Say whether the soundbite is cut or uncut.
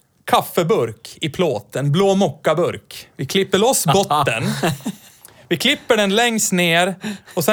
uncut